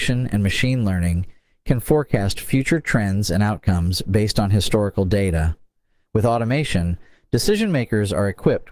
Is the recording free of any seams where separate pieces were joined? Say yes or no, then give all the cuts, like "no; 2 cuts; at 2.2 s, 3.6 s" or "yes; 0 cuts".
no; 1 cut; at 6.1 s